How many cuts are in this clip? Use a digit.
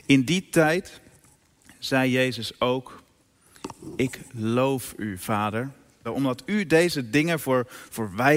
1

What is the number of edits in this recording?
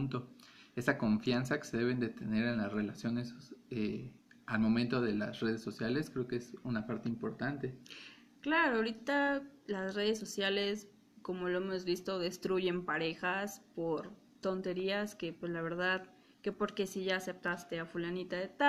0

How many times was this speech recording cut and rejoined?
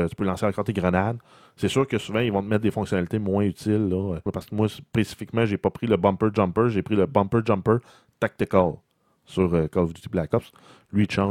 1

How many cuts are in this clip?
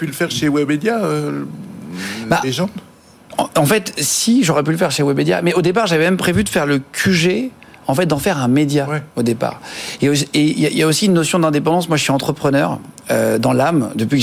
0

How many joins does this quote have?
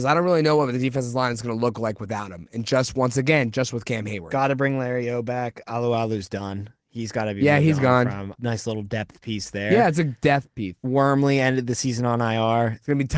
1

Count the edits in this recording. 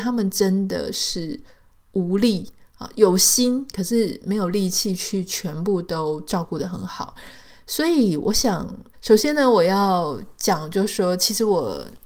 1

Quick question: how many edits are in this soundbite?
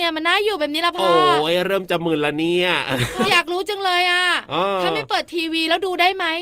1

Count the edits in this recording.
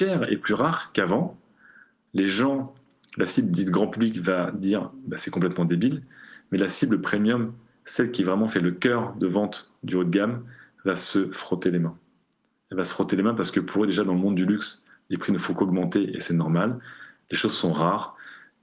0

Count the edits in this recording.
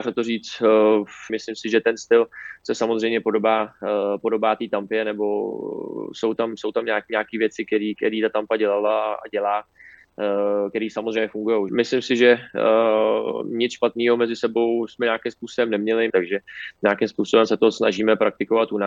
3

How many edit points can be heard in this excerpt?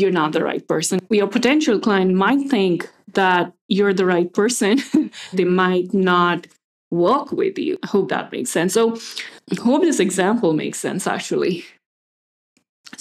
1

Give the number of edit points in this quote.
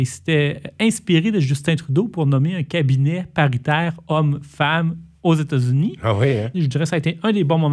1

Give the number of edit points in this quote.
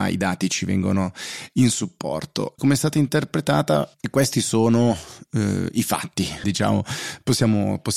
3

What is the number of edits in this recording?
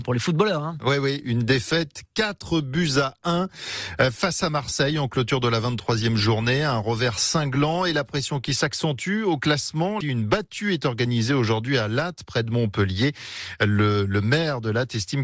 1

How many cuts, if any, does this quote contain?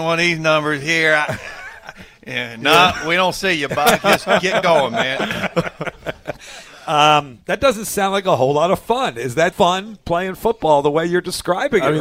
1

